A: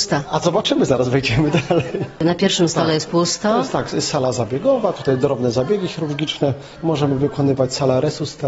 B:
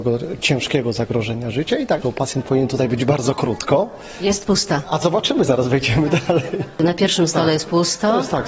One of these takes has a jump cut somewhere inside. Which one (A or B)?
B